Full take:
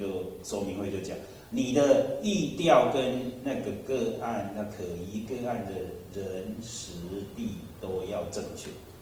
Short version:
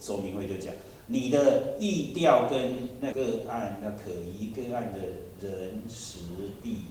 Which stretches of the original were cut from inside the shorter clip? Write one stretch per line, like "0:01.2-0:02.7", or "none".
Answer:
0:03.6-0:03.9